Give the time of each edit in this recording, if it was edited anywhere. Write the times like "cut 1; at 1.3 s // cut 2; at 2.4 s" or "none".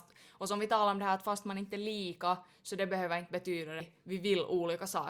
cut 1; at 3.8 s